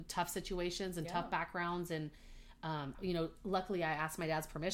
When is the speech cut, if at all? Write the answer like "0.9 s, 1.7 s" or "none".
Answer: 2.9 s